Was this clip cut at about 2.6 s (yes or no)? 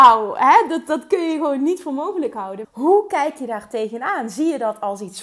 yes